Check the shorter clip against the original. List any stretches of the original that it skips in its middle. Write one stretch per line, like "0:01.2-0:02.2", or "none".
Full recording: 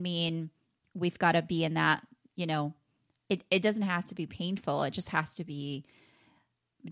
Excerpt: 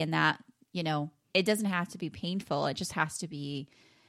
0:02.9-0:03.5